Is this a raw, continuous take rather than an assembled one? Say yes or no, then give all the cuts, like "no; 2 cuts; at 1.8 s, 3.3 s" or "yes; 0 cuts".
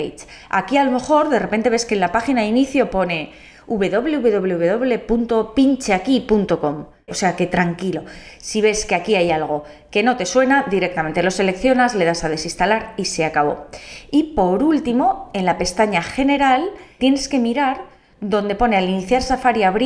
no; 2 cuts; at 7.1 s, 17.0 s